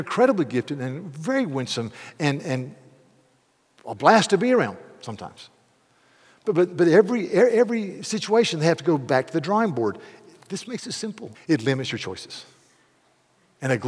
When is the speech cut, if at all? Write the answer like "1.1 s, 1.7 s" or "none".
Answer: 11.3 s

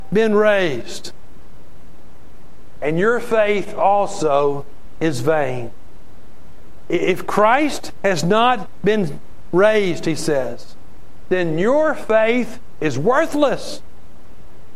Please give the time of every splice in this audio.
2.8 s

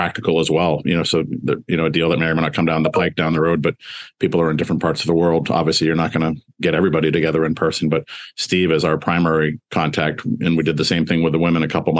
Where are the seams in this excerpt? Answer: none

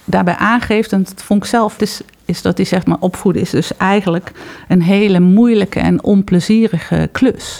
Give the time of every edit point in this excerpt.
1.8 s

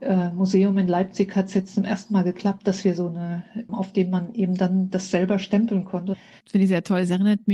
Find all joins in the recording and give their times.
3.7 s

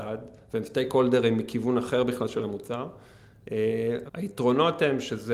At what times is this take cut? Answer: 4.1 s

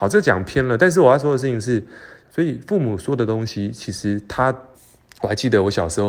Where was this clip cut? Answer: 2.2 s, 4.7 s

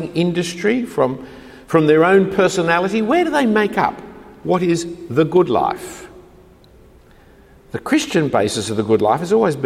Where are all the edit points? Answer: none

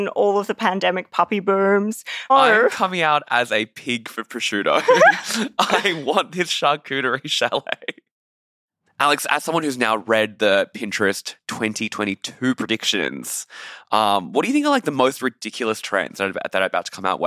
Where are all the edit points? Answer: 2.3 s

